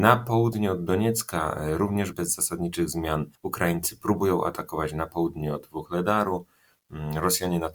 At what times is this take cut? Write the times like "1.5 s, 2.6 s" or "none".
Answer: 2.1 s